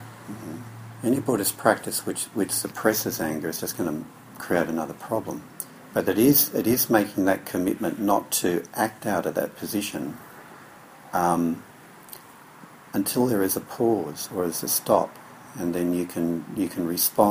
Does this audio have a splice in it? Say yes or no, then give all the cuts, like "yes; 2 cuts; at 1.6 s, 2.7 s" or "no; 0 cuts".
yes; 1 cut; at 5.9 s